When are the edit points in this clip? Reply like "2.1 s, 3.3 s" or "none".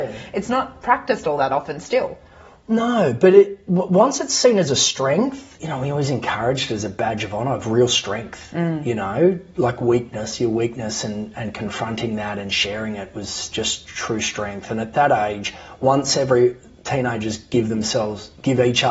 none